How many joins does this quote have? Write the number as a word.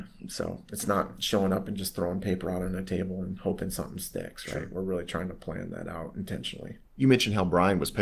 one